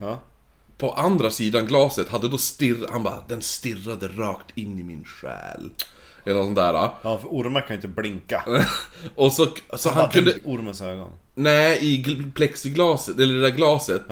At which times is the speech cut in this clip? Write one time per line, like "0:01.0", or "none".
0:10.4